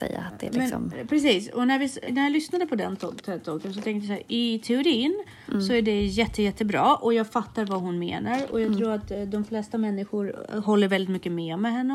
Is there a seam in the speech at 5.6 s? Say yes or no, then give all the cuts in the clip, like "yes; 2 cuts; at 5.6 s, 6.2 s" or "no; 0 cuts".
no; 1 cut; at 2.1 s